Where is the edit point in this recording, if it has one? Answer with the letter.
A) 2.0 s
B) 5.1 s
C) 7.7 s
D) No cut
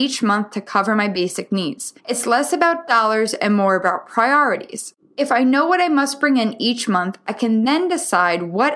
A